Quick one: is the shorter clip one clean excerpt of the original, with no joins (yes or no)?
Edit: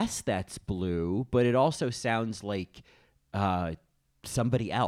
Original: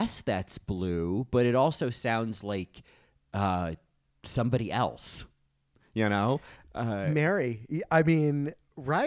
yes